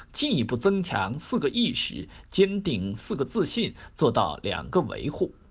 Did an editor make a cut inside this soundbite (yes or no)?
no